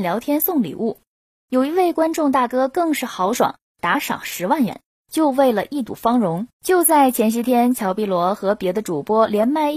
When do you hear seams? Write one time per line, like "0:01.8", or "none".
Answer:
0:06.5